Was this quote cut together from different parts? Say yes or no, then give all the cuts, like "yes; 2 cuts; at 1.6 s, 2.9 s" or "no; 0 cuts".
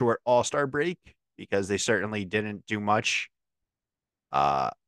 no; 0 cuts